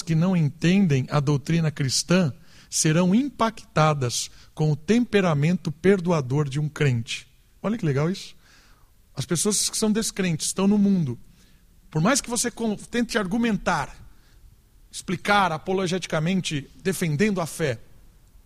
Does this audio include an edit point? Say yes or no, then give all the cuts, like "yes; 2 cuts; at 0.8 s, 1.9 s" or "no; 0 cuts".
no; 0 cuts